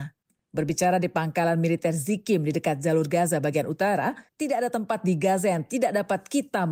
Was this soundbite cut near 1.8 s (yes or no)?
no